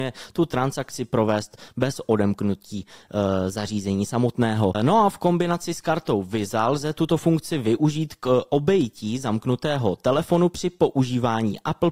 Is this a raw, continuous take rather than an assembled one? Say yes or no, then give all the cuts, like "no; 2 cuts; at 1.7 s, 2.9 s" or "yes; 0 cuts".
no; 1 cut; at 4.7 s